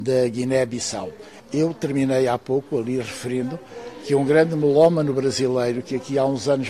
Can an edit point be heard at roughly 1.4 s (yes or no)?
yes